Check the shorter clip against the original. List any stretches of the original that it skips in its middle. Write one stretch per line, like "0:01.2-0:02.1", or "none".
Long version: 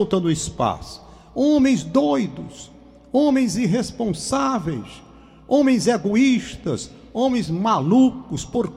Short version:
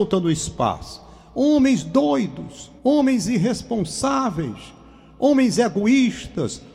0:02.8-0:03.1